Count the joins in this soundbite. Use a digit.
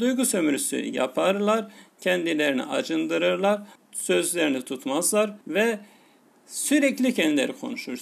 2